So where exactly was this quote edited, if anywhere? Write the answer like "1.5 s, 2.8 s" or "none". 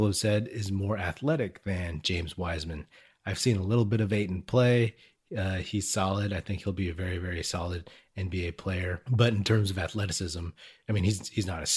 none